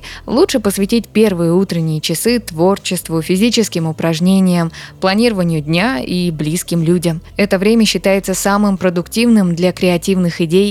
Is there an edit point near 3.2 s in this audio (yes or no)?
no